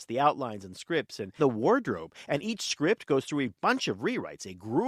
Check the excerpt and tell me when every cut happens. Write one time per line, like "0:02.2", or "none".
0:01.4